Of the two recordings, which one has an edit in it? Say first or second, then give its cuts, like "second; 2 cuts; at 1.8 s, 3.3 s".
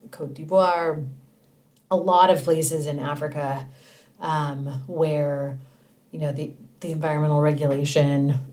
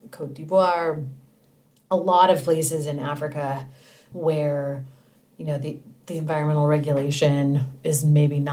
second; 1 cut; at 4.1 s